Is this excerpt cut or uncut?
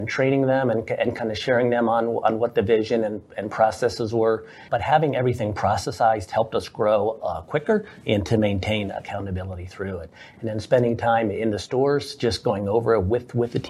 cut